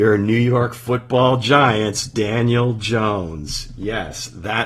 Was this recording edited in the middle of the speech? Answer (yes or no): no